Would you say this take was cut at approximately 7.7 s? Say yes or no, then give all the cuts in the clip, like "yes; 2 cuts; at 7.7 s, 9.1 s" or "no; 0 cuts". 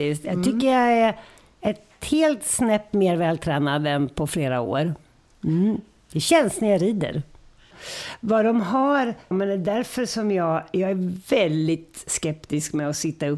yes; 2 cuts; at 7.7 s, 9.3 s